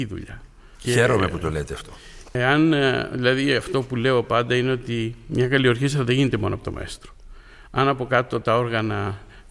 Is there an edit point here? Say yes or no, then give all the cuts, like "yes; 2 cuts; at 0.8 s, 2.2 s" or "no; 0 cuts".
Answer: no; 0 cuts